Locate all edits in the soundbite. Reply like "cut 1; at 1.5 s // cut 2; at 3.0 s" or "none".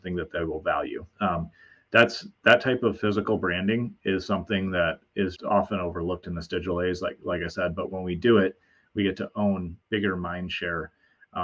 cut 1; at 1.1 s // cut 2; at 5.4 s